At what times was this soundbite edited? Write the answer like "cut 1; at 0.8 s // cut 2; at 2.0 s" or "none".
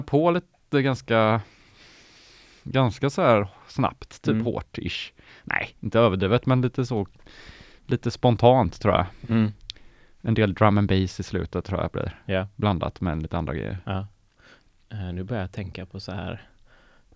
none